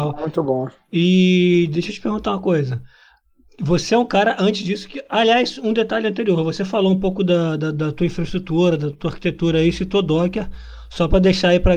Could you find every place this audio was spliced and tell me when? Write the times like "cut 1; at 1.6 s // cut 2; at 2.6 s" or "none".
none